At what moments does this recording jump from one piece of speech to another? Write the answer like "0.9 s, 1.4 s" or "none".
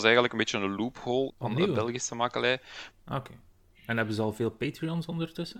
1.3 s, 2.9 s